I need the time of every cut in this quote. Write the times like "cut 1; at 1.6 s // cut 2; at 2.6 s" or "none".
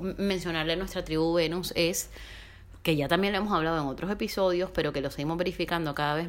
none

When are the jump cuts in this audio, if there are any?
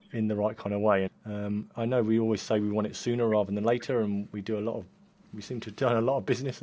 cut 1; at 1.1 s

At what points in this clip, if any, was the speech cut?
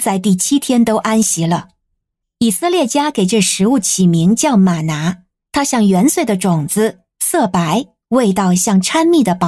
none

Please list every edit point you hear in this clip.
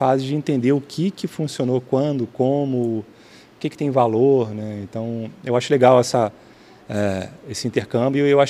none

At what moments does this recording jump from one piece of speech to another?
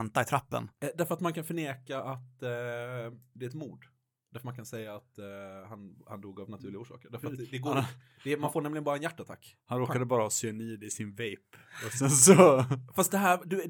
none

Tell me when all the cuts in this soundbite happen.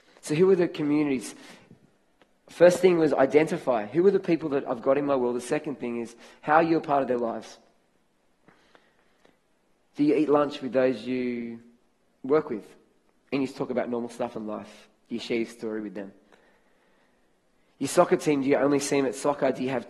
none

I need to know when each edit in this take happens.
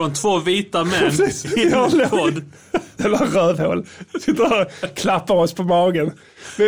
cut 1; at 2.9 s

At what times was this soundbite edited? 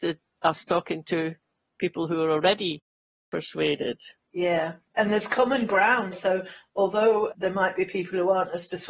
cut 1; at 6.1 s // cut 2; at 7.3 s

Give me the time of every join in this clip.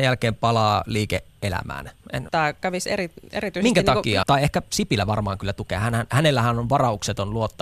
cut 1; at 2.3 s // cut 2; at 4.2 s

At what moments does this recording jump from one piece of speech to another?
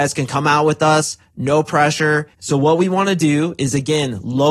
cut 1; at 2.3 s

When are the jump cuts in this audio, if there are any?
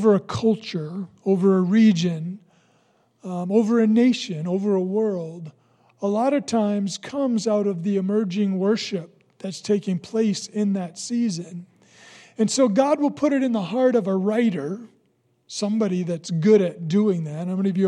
none

